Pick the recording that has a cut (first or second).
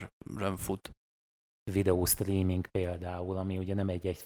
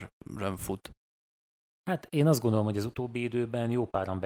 first